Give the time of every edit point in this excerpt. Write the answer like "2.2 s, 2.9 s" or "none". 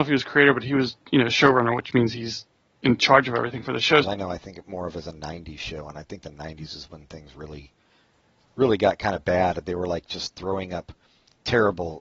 4.0 s